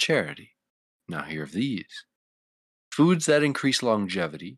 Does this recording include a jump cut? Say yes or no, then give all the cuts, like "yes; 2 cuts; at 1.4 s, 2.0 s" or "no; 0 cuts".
no; 0 cuts